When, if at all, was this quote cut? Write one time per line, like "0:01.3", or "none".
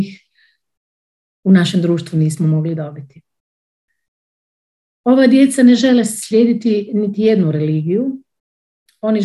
none